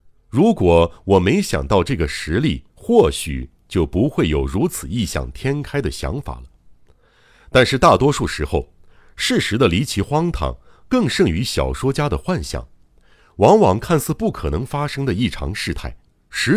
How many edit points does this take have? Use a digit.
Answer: 1